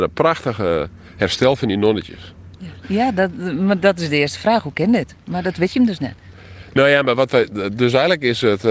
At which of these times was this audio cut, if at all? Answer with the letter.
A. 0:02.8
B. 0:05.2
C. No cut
A